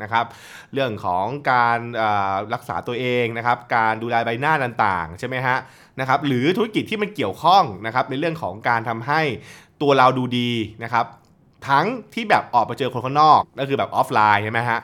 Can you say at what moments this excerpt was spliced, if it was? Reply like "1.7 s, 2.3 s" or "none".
13.4 s